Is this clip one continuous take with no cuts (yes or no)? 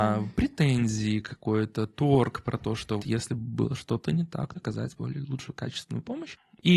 no